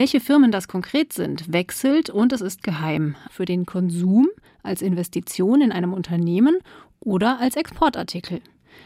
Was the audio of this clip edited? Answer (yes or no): yes